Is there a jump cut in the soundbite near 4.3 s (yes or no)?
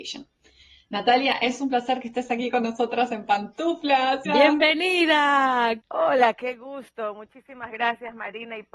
yes